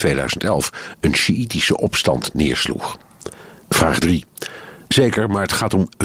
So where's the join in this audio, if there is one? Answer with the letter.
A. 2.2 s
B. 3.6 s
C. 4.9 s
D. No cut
C